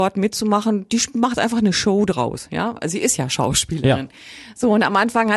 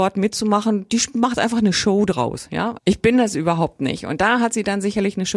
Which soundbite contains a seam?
second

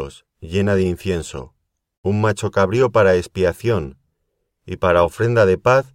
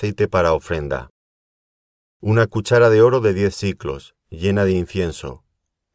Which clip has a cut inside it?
first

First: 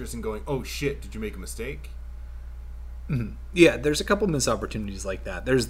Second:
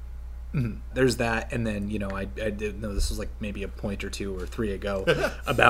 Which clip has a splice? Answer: second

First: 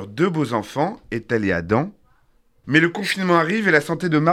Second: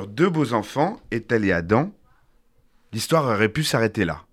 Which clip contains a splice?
first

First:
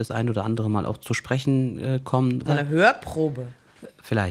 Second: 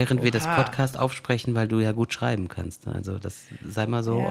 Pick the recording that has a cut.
first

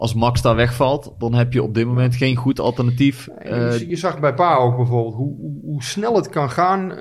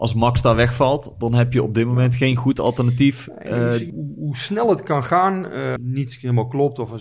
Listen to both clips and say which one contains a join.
second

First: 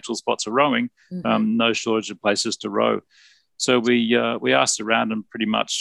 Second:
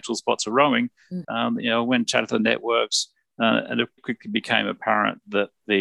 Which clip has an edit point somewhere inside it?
second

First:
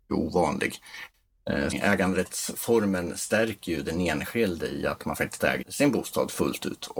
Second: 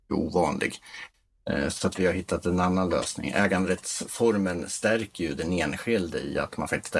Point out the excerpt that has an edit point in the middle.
first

